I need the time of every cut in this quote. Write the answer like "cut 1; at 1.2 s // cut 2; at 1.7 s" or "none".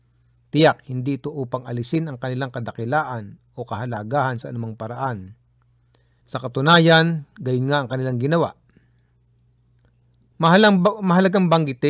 cut 1; at 6.2 s